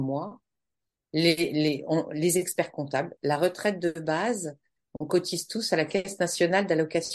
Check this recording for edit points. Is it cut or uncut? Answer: cut